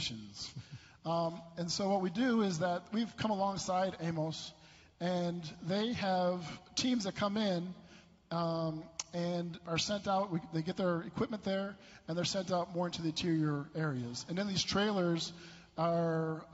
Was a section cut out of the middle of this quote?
no; 0 cuts

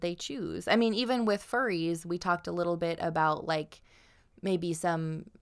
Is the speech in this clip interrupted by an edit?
no; 0 cuts

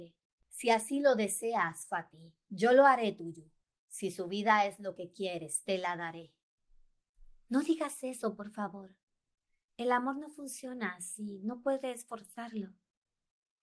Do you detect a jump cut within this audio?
no; 0 cuts

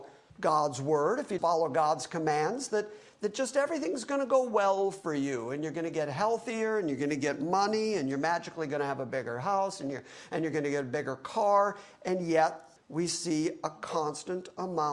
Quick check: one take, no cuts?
no; 2 cuts; at 1.4 s, 12.8 s

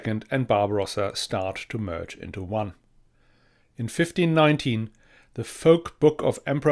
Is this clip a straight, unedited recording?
yes; 0 cuts

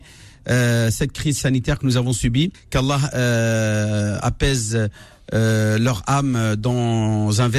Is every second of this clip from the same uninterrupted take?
no; 1 cut; at 2.5 s

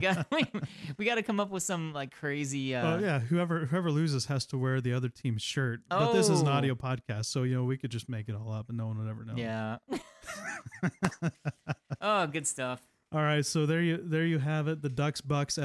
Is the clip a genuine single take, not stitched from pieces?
yes; 0 cuts

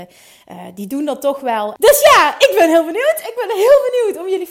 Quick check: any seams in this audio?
yes; 1 cut; at 1.8 s

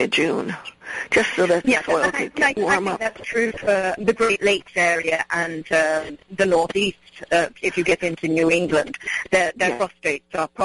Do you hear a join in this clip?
yes; 2 cuts; at 4.0 s, 7.5 s

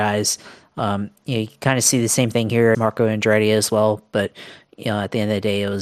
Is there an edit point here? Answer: yes; 1 cut; at 2.7 s

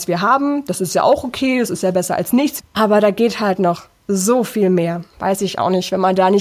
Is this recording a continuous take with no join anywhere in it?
no; 2 cuts; at 2.6 s, 5.1 s

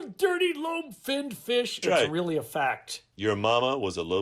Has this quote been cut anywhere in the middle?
yes; 1 cut; at 1.8 s

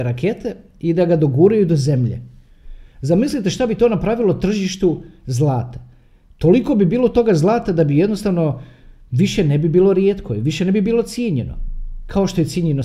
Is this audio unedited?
yes; 0 cuts

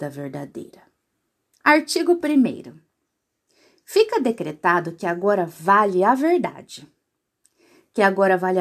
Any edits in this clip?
yes; 1 cut; at 1.6 s

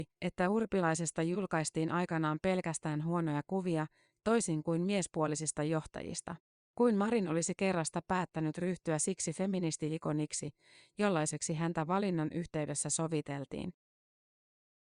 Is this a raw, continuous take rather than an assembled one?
no; 1 cut; at 6.6 s

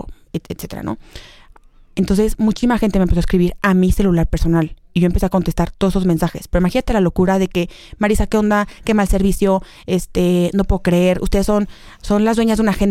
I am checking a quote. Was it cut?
no; 0 cuts

